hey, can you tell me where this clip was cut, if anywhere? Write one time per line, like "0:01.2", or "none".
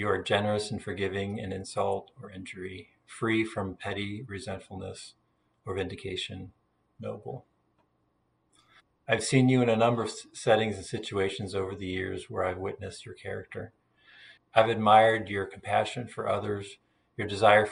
0:06.8
0:14.4